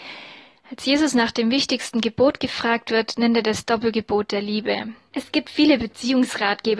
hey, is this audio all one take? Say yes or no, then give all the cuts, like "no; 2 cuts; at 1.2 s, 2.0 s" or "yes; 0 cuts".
no; 1 cut; at 5.1 s